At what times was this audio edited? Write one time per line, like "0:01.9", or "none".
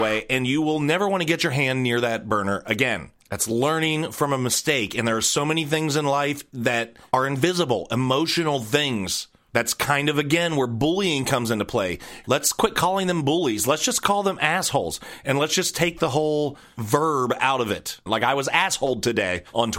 0:12.2
0:18.1